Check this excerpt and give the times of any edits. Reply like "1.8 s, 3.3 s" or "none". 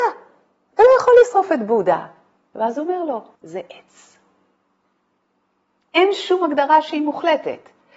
3.4 s